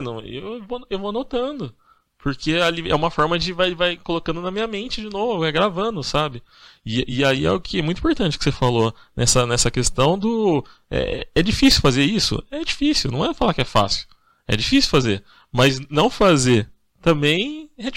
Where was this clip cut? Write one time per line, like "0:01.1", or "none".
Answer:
none